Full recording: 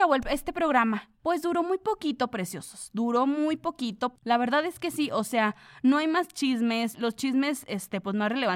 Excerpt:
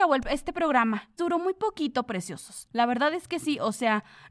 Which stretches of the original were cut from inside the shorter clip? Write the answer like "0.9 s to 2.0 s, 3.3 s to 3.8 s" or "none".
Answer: 1.2 s to 1.4 s, 2.9 s to 4.2 s